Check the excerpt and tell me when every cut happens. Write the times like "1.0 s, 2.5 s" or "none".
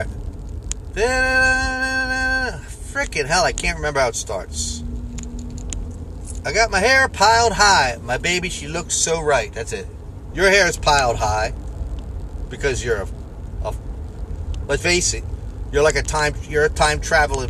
10.3 s, 14.8 s